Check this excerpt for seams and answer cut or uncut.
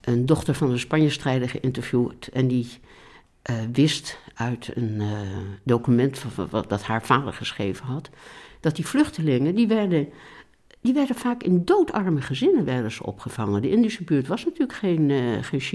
uncut